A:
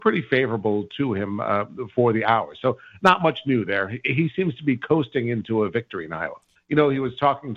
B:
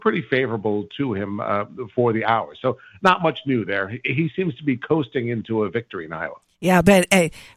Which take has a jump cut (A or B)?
A